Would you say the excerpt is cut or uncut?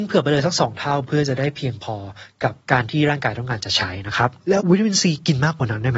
cut